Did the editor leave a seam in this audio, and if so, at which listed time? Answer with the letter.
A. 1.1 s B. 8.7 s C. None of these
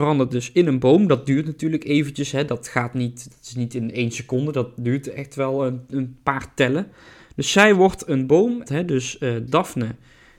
B